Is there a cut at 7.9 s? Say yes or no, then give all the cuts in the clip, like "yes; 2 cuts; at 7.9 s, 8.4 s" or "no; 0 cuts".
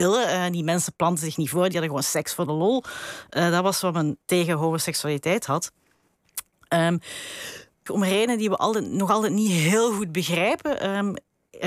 yes; 1 cut; at 7.9 s